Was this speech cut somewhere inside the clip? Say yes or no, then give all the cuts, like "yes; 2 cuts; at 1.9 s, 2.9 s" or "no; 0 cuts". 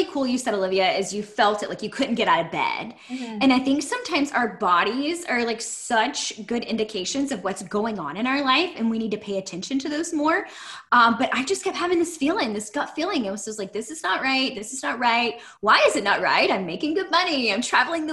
no; 0 cuts